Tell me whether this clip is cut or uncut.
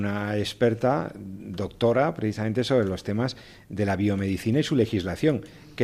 uncut